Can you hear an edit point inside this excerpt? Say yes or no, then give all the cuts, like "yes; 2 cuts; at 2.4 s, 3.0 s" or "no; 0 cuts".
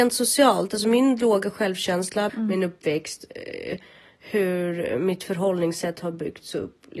yes; 1 cut; at 2.3 s